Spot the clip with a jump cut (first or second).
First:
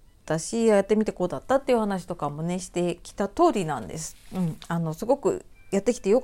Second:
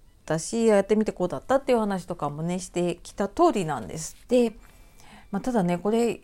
second